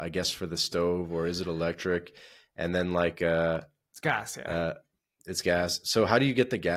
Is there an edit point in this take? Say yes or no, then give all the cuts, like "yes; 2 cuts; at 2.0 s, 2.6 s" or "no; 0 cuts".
no; 0 cuts